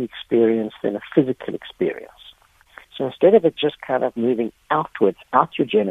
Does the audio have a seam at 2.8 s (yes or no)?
yes